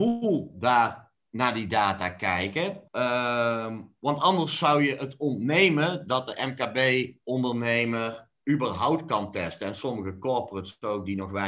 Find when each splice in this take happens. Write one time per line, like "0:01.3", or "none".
0:02.9

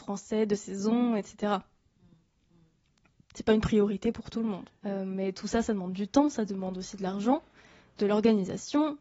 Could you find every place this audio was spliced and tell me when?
0:04.8

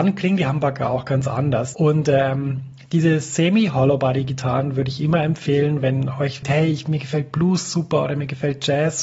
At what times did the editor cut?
0:01.7
0:06.4

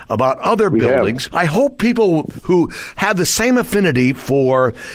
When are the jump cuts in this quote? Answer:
0:01.3

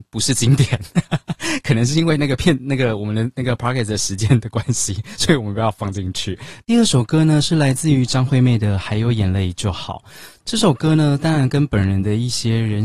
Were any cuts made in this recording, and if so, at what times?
0:06.6

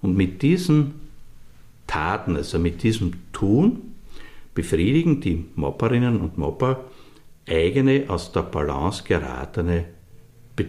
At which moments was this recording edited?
none

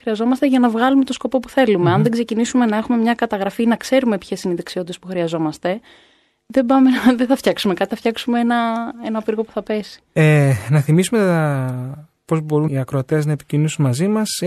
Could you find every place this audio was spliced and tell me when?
0:12.7

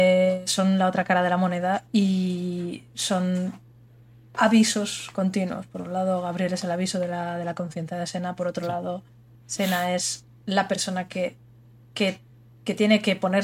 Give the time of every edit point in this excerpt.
none

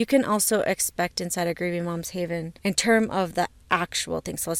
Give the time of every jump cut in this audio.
0:02.6

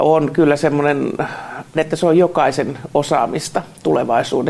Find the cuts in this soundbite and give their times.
0:01.7

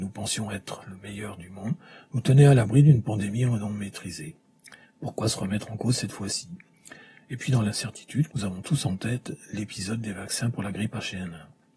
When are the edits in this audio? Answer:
0:04.8
0:08.3

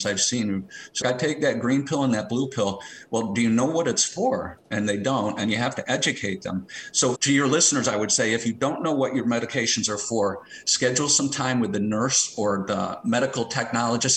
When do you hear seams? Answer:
0:01.0
0:07.2

